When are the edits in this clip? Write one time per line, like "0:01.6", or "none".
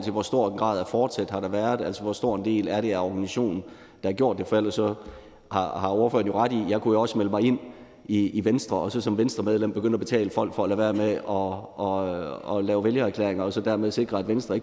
none